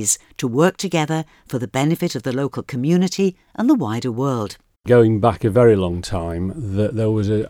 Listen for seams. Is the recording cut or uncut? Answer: cut